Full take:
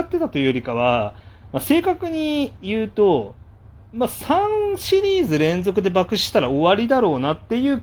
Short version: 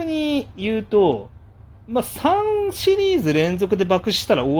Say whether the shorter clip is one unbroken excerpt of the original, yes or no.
yes